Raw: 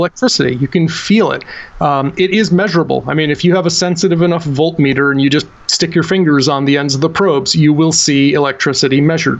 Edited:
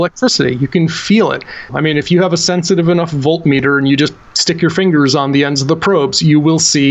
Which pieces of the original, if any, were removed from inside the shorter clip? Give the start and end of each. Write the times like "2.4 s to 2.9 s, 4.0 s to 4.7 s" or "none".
1.7 s to 3.0 s